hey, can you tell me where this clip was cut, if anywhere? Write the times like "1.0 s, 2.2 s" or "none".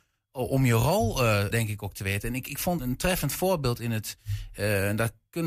1.5 s, 2.8 s